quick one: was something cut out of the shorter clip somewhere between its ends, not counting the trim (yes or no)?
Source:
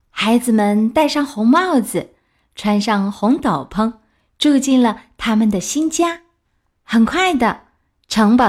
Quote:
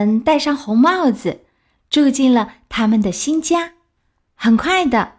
yes